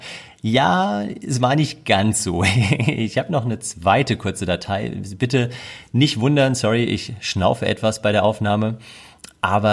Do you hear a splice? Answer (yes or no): no